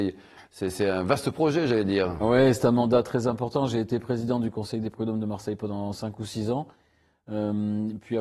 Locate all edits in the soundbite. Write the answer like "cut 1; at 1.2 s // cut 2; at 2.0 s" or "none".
none